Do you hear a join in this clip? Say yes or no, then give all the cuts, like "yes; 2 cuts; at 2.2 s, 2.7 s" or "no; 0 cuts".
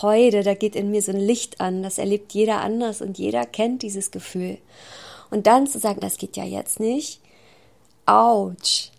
yes; 1 cut; at 6.0 s